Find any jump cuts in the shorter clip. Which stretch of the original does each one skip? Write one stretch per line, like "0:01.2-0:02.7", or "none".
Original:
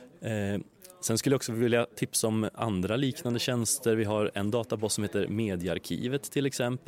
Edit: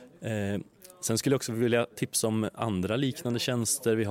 none